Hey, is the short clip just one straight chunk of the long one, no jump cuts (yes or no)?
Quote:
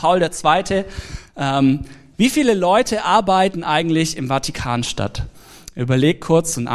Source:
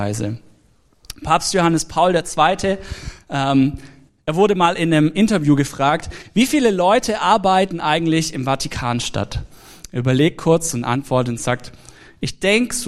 no